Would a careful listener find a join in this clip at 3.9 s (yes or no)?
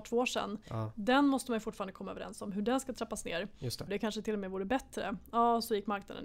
yes